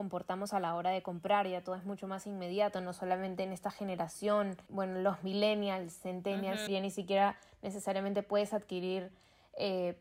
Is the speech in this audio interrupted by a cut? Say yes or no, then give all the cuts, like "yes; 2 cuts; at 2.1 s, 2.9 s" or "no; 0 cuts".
yes; 1 cut; at 6.7 s